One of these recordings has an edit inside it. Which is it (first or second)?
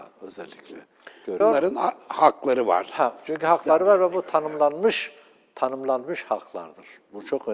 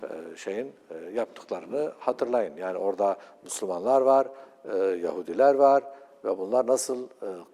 first